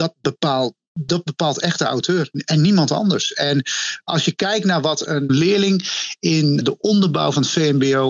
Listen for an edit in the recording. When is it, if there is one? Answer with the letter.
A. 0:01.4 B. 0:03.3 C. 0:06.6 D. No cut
C